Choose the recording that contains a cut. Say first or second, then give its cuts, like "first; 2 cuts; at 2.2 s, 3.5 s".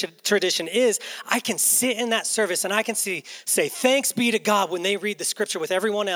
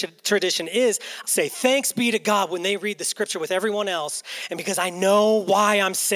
second; 1 cut; at 1.2 s